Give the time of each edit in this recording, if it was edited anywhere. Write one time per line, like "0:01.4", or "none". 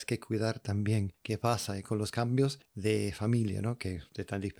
none